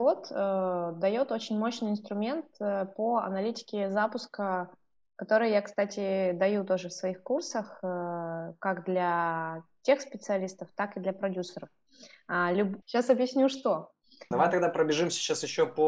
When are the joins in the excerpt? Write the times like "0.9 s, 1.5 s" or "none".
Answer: 12.8 s, 14.3 s